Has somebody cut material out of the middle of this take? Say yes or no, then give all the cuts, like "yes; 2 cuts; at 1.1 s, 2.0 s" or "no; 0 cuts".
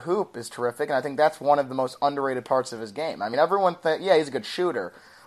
no; 0 cuts